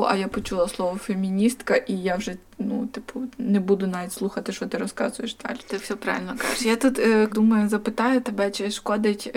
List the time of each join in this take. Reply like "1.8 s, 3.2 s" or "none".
5.6 s, 7.3 s